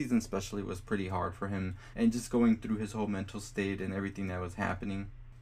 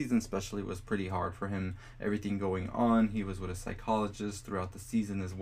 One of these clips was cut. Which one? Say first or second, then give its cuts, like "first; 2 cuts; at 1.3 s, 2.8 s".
first; 1 cut; at 1.9 s